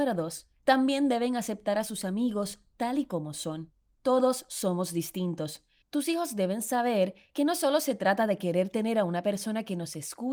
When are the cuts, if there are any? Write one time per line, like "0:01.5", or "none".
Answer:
0:05.8